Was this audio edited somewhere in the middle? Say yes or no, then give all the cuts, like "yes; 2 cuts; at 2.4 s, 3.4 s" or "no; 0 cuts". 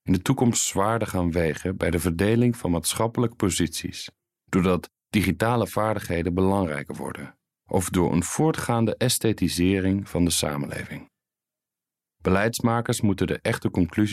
no; 0 cuts